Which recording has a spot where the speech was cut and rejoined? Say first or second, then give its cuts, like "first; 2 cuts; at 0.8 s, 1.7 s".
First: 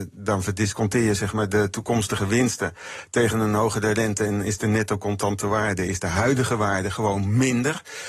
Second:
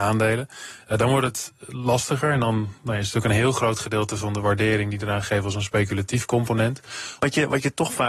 second; 1 cut; at 7.2 s